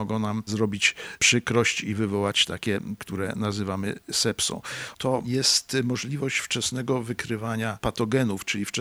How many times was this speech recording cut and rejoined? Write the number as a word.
two